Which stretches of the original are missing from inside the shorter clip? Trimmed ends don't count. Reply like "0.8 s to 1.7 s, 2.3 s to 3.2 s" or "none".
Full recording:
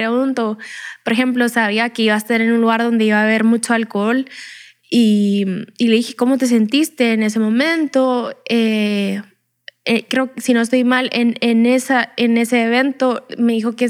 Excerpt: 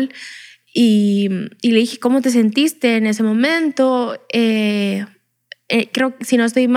none